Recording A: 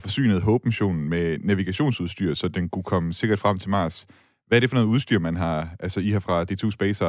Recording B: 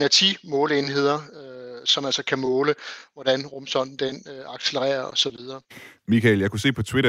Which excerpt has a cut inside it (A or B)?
B